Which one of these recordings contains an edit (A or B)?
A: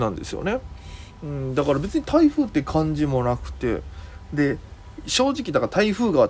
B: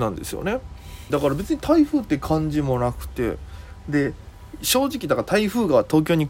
B